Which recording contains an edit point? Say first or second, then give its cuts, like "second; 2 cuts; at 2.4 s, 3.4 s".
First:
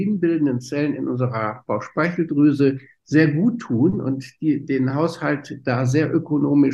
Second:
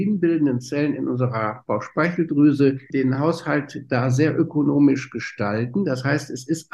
second; 1 cut; at 2.9 s